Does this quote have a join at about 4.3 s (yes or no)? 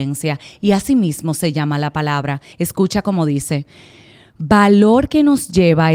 no